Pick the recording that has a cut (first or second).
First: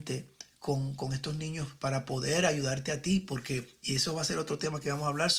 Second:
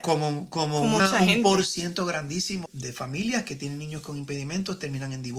second